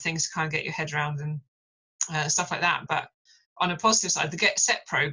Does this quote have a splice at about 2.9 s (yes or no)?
yes